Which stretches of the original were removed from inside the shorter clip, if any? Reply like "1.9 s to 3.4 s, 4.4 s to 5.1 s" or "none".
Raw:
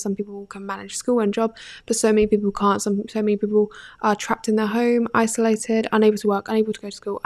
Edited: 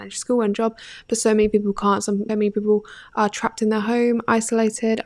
3.1 s to 3.2 s